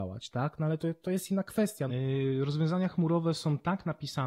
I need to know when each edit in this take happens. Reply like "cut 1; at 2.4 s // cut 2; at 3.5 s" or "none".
cut 1; at 1.9 s